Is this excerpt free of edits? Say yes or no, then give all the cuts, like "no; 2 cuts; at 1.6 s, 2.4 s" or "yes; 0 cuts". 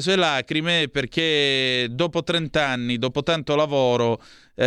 yes; 0 cuts